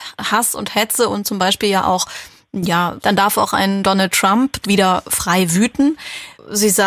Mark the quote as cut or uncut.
cut